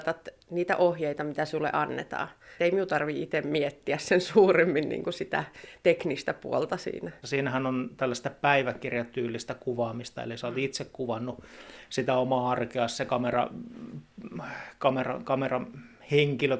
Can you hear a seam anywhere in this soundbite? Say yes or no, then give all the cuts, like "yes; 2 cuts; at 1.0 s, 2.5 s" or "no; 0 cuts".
yes; 2 cuts; at 2.6 s, 7.2 s